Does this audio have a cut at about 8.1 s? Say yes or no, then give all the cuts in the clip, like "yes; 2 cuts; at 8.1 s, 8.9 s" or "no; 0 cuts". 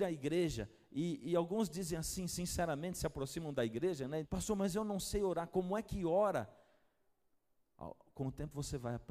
no; 1 cut; at 4.2 s